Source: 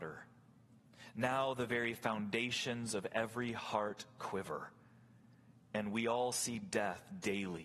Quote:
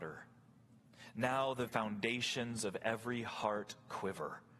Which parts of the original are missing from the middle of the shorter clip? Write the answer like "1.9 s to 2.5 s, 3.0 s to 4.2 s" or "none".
1.7 s to 2.0 s